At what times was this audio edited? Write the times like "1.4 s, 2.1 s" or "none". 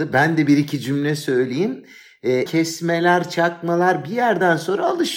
2.5 s